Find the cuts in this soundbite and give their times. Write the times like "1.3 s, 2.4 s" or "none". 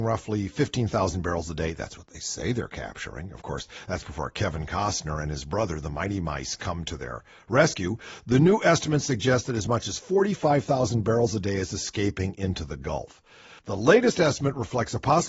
none